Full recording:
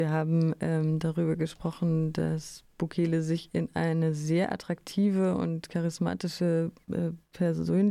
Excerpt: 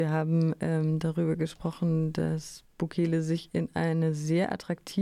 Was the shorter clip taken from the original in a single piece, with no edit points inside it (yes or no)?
yes